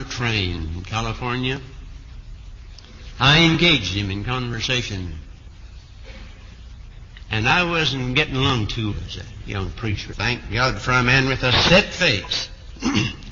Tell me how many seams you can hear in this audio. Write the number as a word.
two